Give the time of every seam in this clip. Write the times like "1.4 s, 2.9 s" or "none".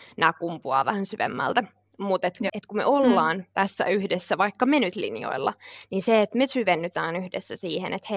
2.5 s